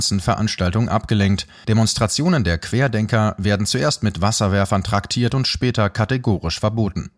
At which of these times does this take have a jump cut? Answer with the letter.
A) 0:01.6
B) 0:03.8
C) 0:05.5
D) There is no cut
A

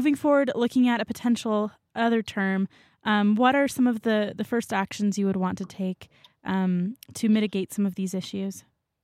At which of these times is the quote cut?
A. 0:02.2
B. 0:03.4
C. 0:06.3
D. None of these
D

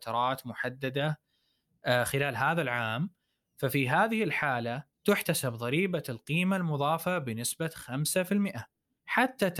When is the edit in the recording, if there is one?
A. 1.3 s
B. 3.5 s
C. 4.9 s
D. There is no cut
C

